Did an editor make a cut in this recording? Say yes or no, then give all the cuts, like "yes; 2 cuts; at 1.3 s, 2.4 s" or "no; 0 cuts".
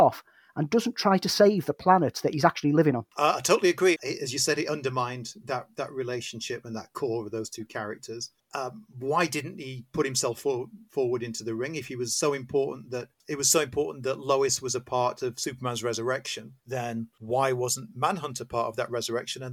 yes; 1 cut; at 4.0 s